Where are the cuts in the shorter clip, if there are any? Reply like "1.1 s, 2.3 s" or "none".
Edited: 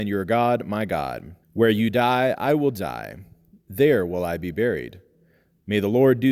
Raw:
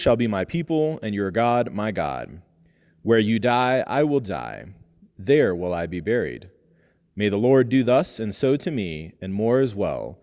1.4 s